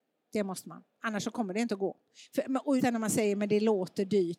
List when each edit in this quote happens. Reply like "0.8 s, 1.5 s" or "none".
2.8 s